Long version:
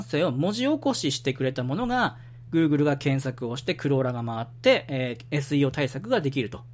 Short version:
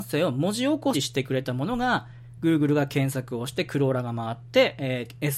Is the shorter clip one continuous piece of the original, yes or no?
no